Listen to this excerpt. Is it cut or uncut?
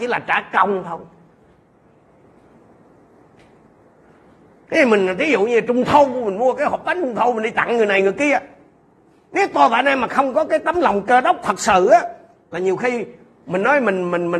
uncut